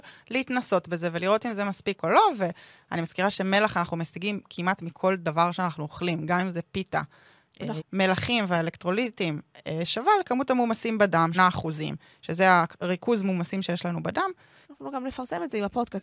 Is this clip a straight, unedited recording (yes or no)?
no